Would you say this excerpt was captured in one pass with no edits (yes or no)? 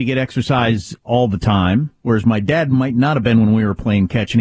yes